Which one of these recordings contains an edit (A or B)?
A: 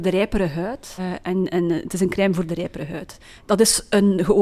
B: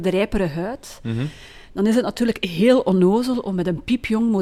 A